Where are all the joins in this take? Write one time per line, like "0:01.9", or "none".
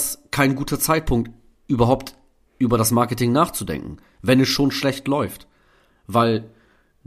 none